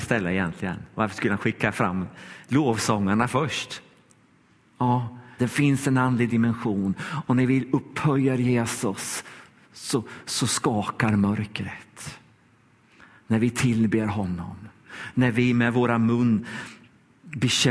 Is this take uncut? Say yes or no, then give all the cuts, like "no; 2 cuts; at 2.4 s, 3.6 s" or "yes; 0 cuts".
no; 1 cut; at 5.4 s